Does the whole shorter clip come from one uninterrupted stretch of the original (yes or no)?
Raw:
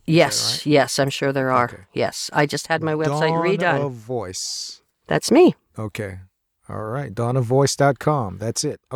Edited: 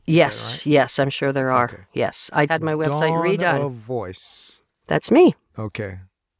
no